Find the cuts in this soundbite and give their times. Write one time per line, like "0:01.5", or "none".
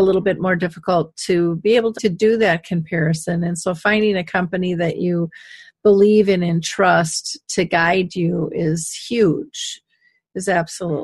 0:02.0